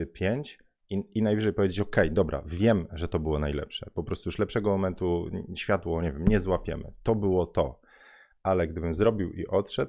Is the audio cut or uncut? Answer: uncut